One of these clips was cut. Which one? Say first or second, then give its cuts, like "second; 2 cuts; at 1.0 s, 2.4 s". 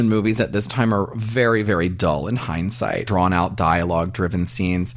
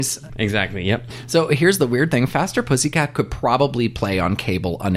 first; 1 cut; at 3.1 s